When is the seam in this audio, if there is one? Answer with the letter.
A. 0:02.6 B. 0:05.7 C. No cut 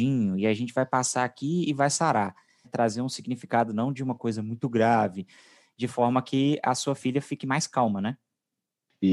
A